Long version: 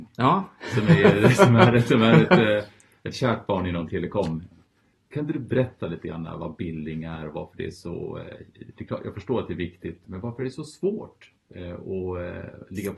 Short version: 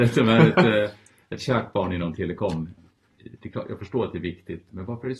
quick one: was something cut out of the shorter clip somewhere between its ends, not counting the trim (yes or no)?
yes